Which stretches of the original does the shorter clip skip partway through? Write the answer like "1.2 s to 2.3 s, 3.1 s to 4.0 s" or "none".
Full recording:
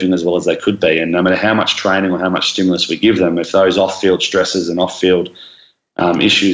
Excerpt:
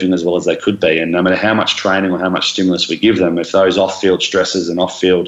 none